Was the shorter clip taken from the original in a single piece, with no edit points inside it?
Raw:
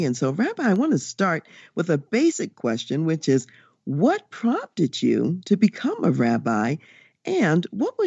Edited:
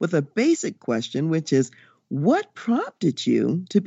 yes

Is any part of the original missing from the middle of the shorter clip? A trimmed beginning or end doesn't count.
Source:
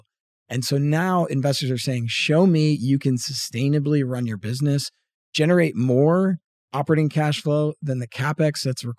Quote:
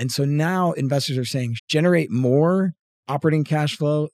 yes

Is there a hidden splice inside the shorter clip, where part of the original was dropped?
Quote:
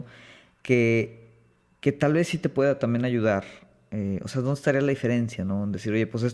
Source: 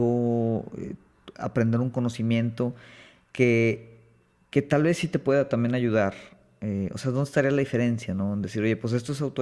no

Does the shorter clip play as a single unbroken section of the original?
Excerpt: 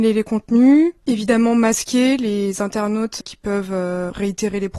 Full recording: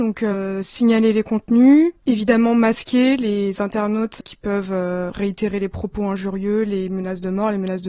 yes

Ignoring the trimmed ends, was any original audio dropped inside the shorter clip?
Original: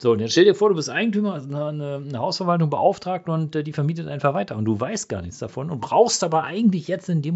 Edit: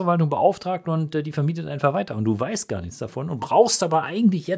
no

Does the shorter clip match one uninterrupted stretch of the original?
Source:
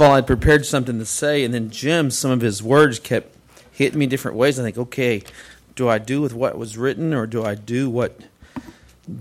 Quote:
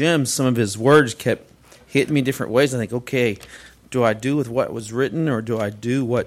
yes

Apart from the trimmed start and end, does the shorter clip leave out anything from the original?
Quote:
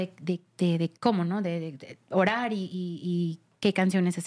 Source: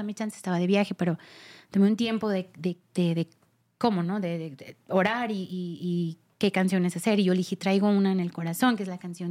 yes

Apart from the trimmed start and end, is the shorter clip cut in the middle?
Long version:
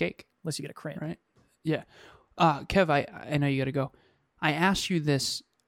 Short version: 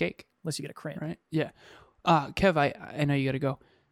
yes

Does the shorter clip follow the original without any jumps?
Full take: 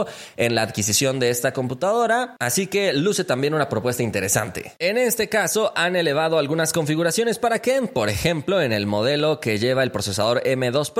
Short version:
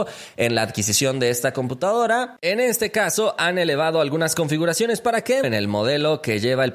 no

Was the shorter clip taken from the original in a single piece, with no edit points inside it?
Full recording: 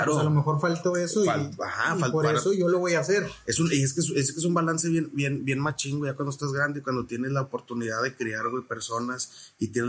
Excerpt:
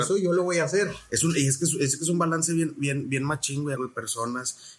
no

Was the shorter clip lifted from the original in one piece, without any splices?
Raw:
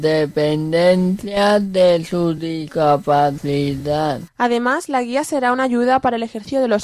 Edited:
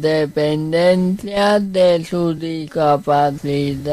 yes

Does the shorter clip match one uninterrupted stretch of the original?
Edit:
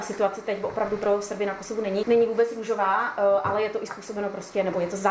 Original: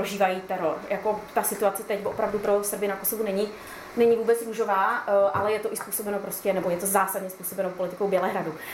no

